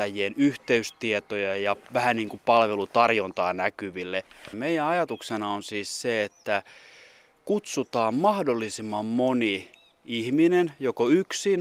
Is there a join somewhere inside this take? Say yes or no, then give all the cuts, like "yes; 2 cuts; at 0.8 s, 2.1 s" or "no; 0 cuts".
yes; 1 cut; at 4.5 s